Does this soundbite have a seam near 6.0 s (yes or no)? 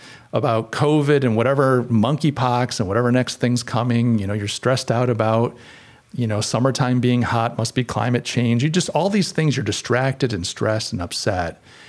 yes